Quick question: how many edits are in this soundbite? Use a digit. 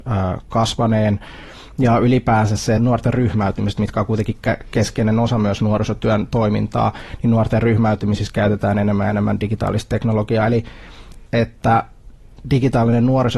2